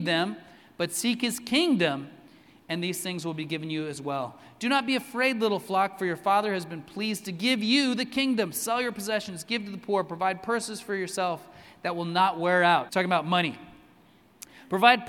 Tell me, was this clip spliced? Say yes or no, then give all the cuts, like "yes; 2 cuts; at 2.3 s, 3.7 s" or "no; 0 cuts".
yes; 1 cut; at 12.9 s